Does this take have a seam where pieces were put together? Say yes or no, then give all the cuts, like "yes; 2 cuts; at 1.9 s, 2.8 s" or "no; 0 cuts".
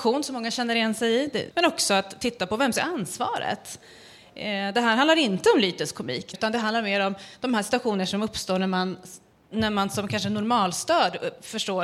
yes; 2 cuts; at 1.5 s, 6.3 s